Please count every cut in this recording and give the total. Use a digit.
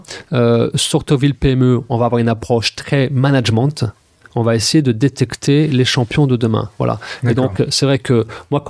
0